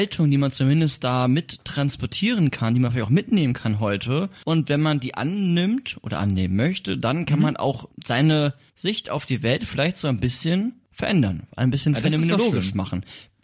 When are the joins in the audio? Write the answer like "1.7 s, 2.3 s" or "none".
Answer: none